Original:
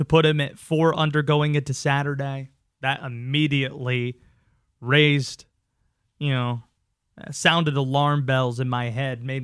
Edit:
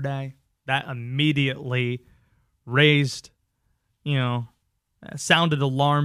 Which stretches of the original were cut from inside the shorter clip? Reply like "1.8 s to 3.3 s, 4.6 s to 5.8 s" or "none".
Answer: none